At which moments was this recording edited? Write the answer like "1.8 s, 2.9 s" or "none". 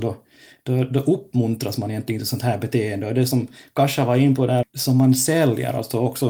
4.6 s